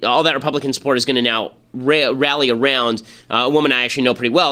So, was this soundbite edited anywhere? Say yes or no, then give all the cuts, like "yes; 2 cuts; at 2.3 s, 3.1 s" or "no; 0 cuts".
no; 0 cuts